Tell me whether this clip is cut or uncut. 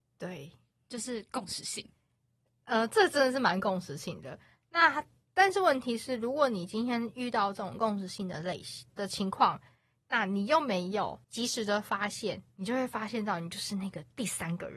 cut